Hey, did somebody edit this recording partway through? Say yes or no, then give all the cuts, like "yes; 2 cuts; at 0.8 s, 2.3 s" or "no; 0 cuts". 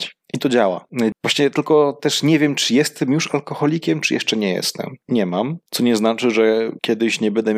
yes; 2 cuts; at 1.1 s, 5.0 s